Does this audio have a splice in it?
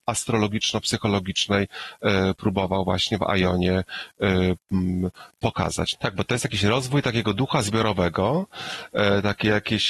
yes; 1 cut; at 5.9 s

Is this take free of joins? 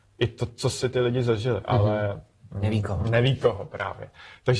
no; 1 cut; at 1.6 s

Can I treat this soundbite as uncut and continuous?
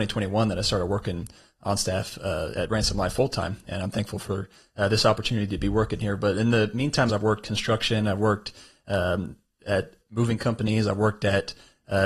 no; 2 cuts; at 7.1 s, 10.0 s

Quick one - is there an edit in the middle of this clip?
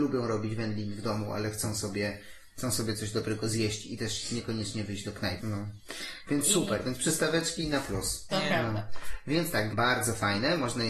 yes; 3 cuts; at 5.4 s, 8.3 s, 9.7 s

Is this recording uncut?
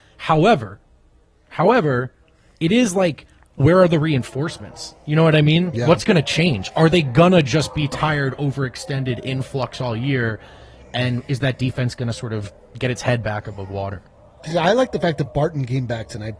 no; 1 cut; at 3.6 s

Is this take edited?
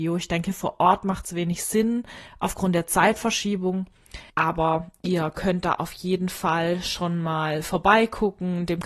yes; 1 cut; at 4.3 s

